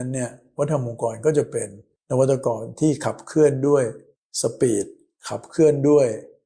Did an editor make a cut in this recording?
no; 0 cuts

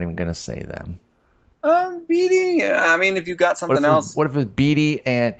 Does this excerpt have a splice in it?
no; 0 cuts

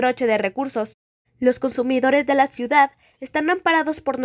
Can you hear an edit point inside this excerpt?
yes; 1 cut; at 1.2 s

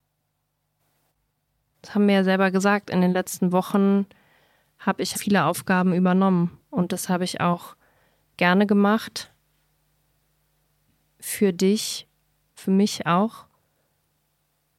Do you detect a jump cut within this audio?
yes; 2 cuts; at 5.1 s, 12.5 s

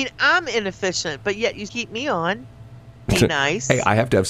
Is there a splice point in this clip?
yes; 2 cuts; at 1.7 s, 3.1 s

